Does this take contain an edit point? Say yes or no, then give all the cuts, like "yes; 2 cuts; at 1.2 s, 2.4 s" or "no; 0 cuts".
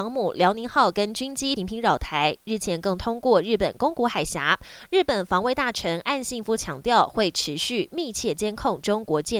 yes; 1 cut; at 1.6 s